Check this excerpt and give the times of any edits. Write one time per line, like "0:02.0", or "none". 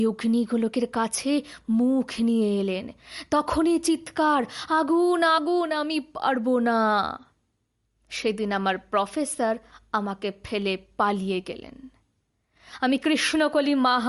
0:05.4